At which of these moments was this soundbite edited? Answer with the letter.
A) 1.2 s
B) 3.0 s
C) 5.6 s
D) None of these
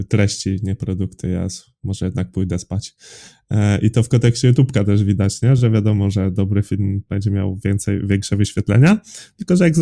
D